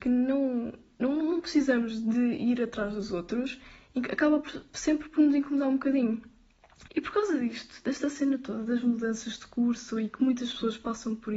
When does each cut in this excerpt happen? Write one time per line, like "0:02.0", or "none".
0:06.9